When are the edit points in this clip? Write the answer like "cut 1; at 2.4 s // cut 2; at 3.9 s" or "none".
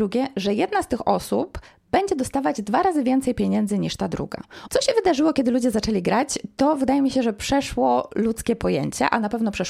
cut 1; at 4.7 s